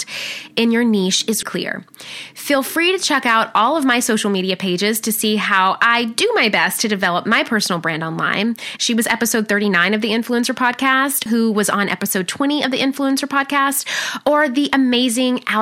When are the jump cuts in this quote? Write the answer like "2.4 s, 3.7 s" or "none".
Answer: 1.4 s, 8.8 s, 11.3 s